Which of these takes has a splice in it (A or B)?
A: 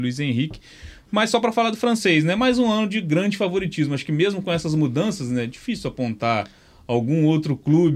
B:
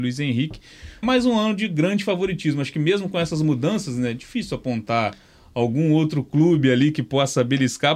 B